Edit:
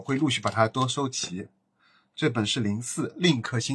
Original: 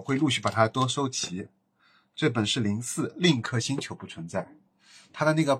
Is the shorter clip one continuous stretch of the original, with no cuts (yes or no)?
yes